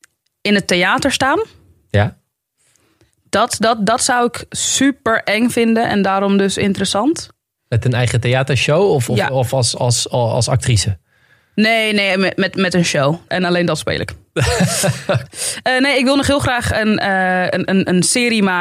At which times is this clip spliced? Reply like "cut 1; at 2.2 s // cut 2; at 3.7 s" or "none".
cut 1; at 13.3 s